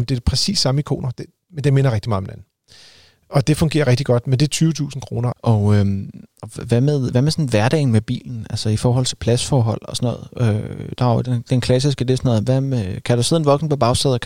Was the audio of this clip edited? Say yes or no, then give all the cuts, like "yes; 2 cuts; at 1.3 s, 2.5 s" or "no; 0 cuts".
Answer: yes; 1 cut; at 5.3 s